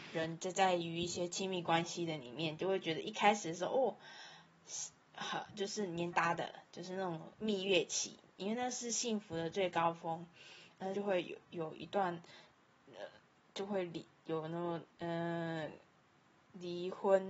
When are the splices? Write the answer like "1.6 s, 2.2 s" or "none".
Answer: 6.1 s, 10.9 s